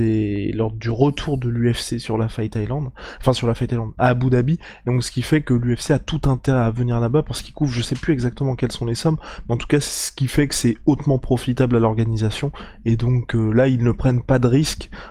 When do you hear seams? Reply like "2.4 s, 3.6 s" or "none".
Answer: none